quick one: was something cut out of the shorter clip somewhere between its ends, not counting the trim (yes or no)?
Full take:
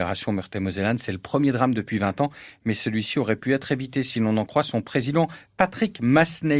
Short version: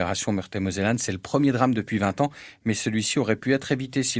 no